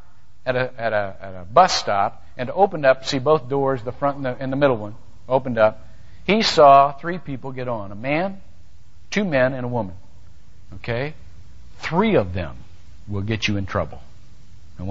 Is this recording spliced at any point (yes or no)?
yes